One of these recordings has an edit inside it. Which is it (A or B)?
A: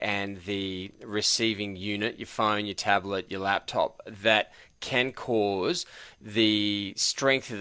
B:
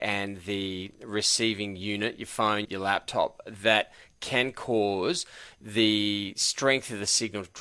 B